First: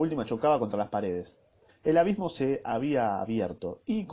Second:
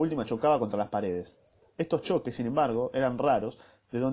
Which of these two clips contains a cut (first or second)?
first